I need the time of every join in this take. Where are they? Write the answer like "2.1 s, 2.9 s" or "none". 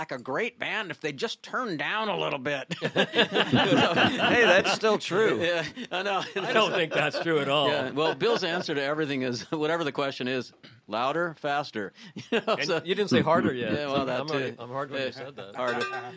none